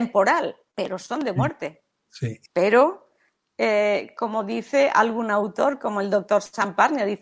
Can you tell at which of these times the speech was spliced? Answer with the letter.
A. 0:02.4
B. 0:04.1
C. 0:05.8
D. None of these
A